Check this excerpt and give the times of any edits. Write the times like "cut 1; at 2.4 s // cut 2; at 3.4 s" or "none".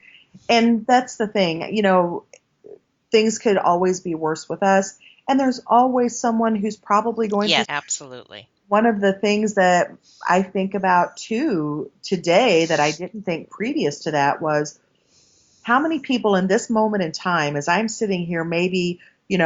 cut 1; at 7.6 s

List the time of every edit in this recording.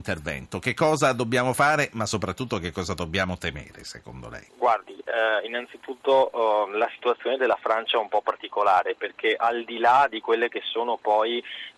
cut 1; at 4.5 s

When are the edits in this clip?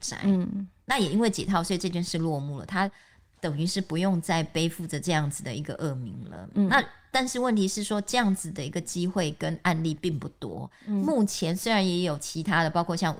none

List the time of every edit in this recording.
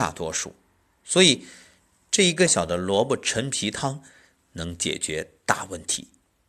cut 1; at 2.5 s

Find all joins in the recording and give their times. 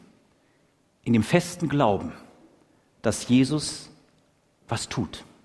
none

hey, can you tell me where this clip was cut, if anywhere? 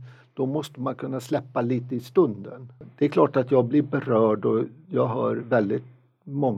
none

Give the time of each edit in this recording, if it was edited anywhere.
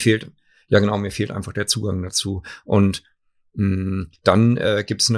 none

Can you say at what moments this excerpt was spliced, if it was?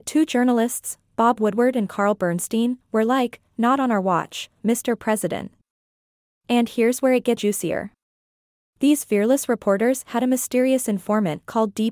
cut 1; at 7.4 s

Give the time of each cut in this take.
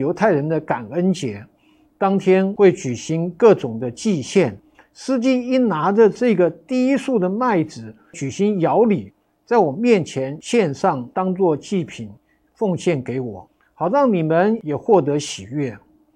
cut 1; at 4.7 s

